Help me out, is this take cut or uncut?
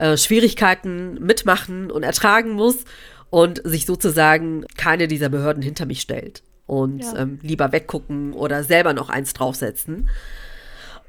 uncut